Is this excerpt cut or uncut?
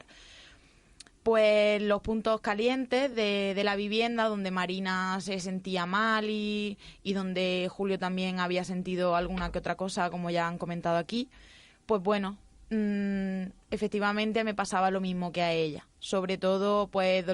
uncut